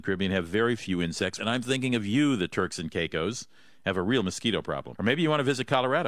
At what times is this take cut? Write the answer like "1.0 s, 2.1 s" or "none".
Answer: 1.4 s, 5.0 s

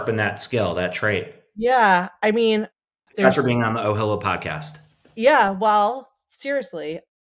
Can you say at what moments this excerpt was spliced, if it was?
none

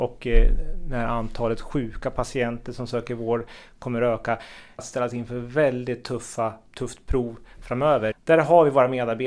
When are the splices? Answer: 4.8 s, 6.7 s, 8.1 s

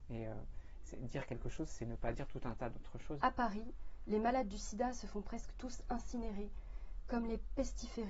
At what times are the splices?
3.2 s

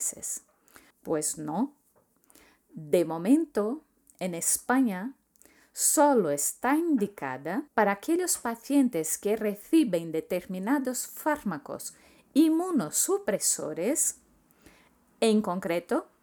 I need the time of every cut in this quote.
0.9 s, 7.7 s

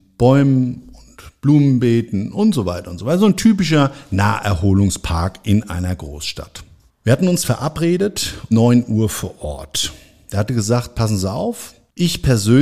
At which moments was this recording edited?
8.5 s, 10.3 s

